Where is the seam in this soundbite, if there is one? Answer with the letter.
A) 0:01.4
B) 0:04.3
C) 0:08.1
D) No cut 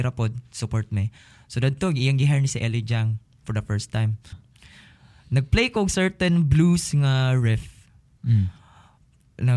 B